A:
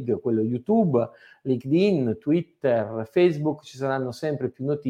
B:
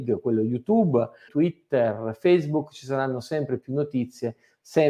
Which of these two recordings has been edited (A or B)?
B